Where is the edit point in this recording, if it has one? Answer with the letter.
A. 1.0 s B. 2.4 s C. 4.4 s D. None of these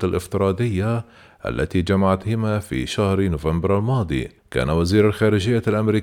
C